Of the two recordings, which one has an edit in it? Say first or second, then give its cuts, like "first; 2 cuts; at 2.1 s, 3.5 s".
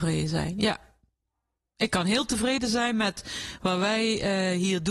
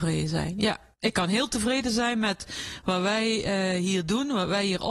second; 1 cut; at 0.9 s